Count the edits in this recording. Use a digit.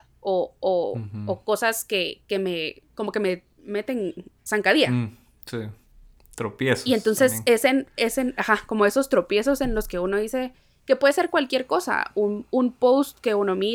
0